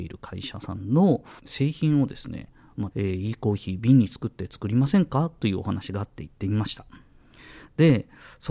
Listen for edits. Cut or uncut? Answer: cut